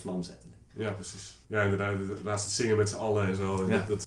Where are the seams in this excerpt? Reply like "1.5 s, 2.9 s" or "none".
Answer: 1.4 s